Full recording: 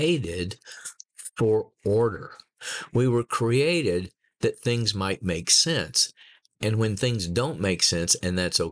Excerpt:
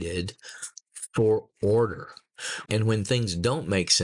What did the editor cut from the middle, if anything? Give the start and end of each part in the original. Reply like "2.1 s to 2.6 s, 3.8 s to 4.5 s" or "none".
2.9 s to 6.6 s